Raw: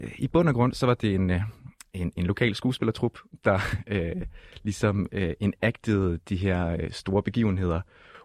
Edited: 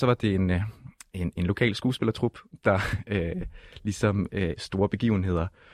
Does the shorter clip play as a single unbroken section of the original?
no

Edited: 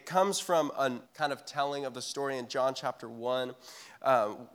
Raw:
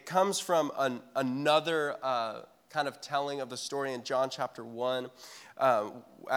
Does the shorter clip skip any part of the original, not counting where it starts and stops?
yes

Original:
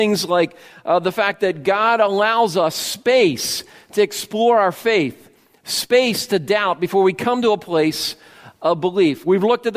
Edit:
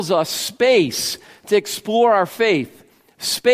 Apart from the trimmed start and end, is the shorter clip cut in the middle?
no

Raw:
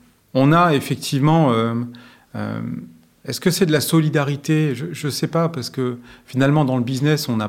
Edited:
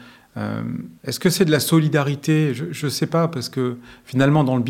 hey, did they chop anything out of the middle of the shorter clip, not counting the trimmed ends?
yes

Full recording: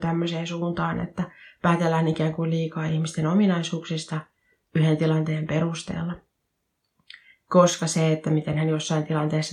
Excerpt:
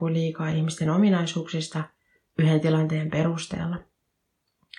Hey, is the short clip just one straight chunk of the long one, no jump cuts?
yes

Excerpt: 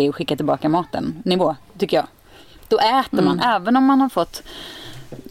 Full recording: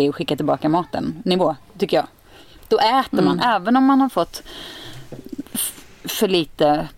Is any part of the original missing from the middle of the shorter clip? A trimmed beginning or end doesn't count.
no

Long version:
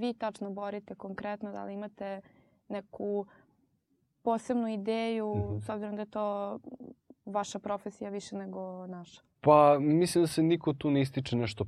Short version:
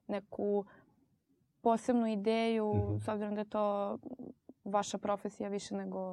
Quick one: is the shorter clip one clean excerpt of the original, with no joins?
yes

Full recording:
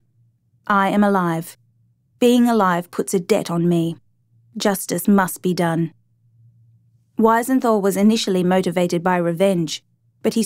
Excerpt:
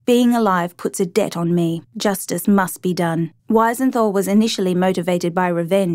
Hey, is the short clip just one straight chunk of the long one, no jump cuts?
no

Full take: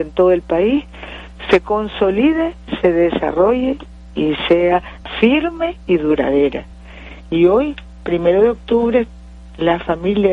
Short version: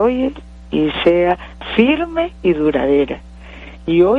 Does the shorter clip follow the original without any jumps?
yes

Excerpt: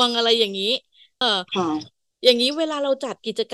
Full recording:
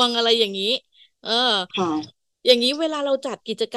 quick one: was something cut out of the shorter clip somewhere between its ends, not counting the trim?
yes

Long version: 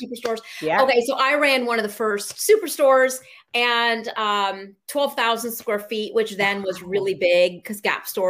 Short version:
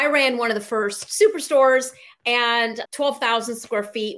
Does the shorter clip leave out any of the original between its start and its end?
yes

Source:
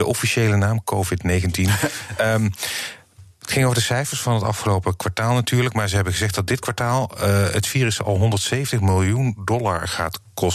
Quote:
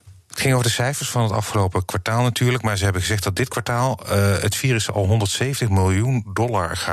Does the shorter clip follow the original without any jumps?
yes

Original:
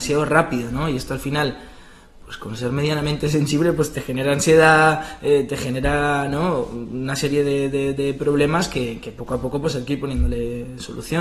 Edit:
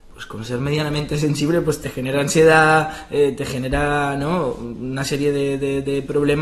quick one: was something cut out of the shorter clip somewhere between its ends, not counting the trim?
no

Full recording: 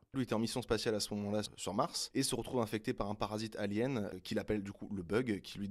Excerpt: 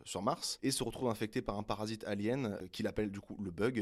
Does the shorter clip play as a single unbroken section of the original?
yes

